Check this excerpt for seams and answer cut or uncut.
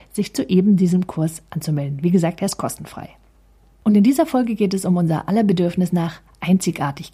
uncut